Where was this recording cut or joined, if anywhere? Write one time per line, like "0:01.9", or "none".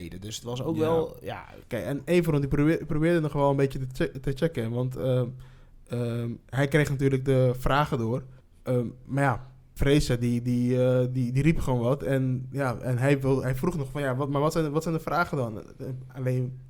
none